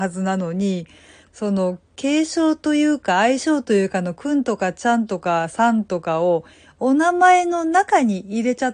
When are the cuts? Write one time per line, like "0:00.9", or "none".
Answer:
0:01.3